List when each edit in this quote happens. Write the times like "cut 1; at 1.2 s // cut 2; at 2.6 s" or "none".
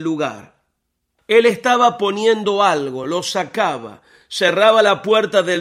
cut 1; at 1.2 s